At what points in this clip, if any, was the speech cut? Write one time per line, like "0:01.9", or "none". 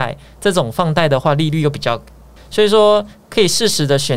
0:02.4